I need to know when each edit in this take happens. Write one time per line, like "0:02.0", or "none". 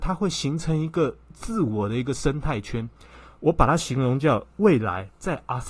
0:01.3